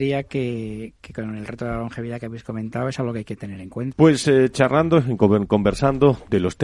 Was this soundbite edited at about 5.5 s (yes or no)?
no